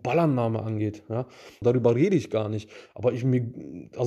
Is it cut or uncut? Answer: cut